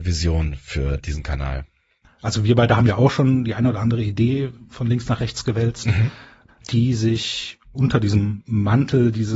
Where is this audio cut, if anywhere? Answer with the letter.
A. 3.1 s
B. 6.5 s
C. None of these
B